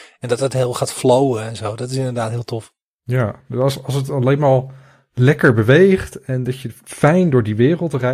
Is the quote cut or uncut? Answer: uncut